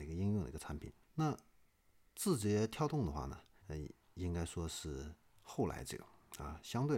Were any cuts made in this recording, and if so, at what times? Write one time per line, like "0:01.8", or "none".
0:01.0
0:03.6